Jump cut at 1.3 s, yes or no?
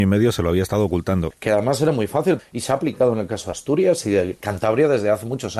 yes